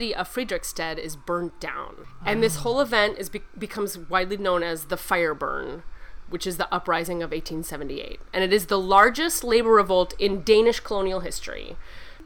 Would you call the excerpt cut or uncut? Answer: uncut